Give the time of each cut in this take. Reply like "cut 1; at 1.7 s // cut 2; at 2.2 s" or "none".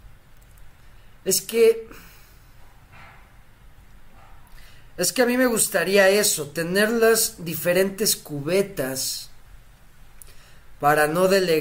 none